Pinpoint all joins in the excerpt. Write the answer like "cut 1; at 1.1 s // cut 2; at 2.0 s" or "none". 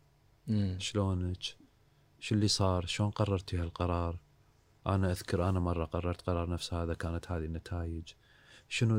none